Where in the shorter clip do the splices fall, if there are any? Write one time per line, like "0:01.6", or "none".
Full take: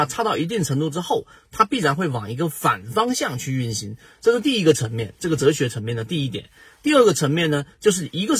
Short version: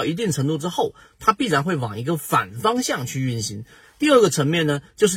0:03.8